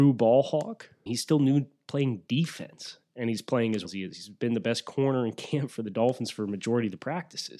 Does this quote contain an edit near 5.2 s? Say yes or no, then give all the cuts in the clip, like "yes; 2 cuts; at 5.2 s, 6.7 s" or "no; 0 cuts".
no; 2 cuts; at 1.1 s, 3.8 s